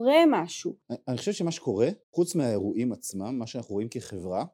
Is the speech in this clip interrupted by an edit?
yes; 1 cut; at 2.0 s

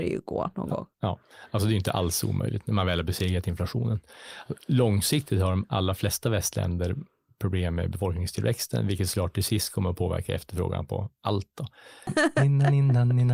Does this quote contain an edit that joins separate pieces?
yes; 1 cut; at 12.1 s

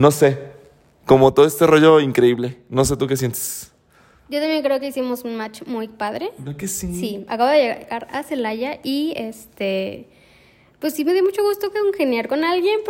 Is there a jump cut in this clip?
no; 0 cuts

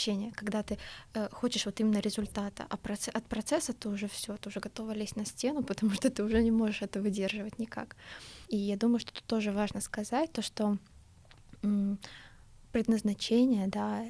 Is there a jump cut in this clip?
no; 0 cuts

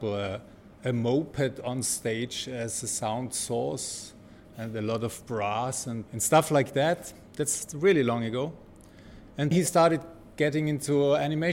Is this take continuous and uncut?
no; 2 cuts; at 6.1 s, 9.5 s

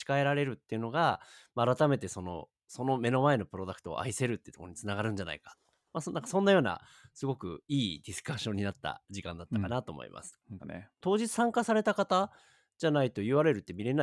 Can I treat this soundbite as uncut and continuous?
no; 1 cut; at 10.6 s

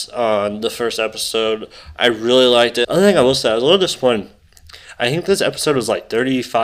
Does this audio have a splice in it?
yes; 1 cut; at 2.8 s

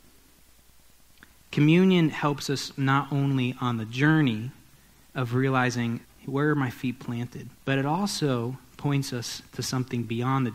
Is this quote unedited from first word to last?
no; 2 cuts; at 6.0 s, 7.6 s

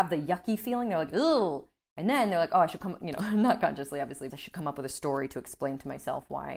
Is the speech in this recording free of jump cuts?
no; 1 cut; at 4.3 s

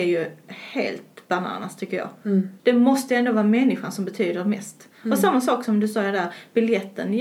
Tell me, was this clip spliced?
yes; 1 cut; at 2.6 s

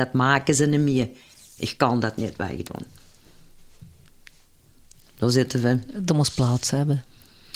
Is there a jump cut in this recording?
no; 0 cuts

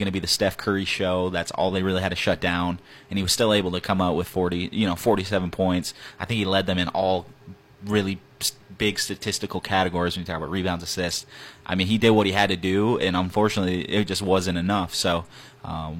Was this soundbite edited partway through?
no; 0 cuts

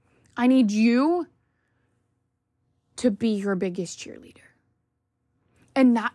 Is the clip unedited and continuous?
yes; 0 cuts

